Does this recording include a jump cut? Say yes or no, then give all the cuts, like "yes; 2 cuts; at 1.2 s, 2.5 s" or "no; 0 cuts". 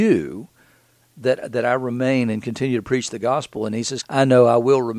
yes; 1 cut; at 4.0 s